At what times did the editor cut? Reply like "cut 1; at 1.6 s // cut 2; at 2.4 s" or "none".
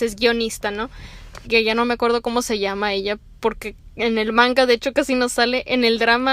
cut 1; at 1.4 s